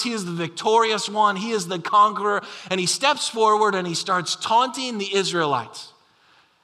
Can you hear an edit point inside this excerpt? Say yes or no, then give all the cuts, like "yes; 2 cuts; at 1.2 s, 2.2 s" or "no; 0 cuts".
no; 0 cuts